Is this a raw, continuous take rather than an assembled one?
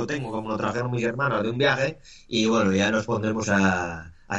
yes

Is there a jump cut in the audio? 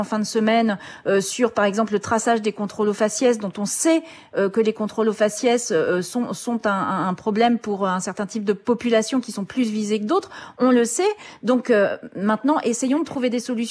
no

